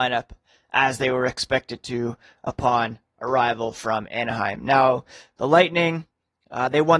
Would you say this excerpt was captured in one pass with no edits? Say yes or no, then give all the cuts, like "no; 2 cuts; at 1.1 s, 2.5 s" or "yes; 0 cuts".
yes; 0 cuts